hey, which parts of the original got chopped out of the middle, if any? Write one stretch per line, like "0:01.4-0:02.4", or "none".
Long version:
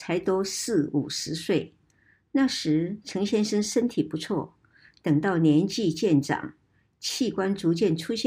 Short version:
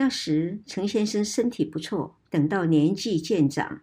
0:04.6-0:05.0